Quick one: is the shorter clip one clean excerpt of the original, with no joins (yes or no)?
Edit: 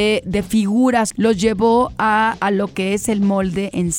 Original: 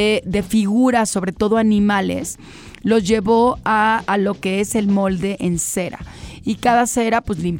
no